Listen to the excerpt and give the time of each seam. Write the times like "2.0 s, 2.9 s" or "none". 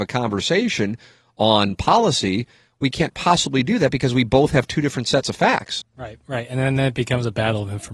5.8 s